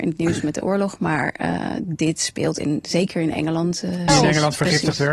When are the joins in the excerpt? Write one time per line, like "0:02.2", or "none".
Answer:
0:04.1

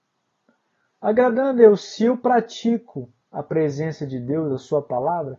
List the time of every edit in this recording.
none

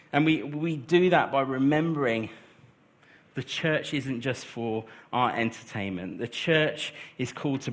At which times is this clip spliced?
none

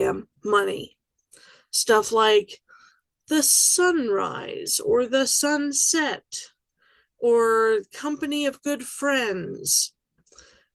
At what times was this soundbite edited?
none

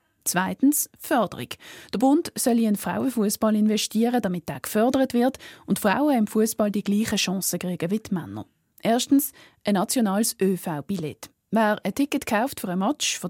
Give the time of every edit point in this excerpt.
0:08.7

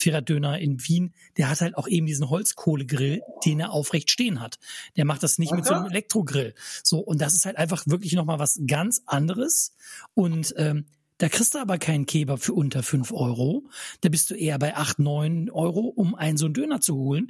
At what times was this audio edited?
none

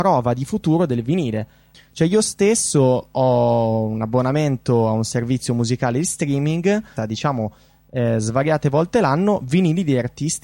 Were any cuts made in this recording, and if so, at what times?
0:01.7
0:07.0

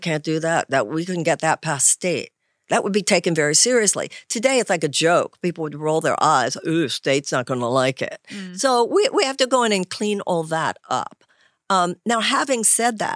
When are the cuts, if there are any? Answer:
none

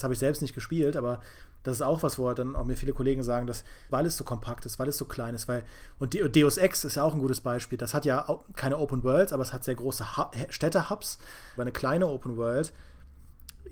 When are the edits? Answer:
0:03.9
0:10.1
0:11.6

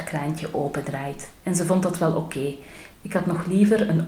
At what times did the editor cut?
0:01.4
0:02.9

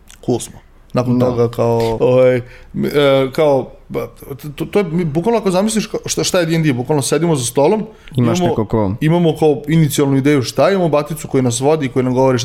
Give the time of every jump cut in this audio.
0:02.0

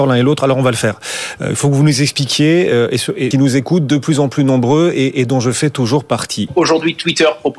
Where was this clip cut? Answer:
0:03.3
0:06.5

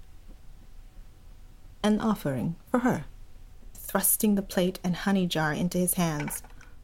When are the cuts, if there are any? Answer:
0:03.7

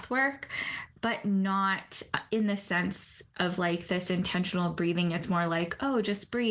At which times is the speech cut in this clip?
none

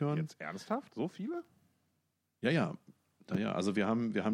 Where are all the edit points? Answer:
none

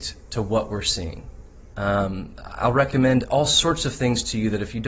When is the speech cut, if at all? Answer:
0:01.7

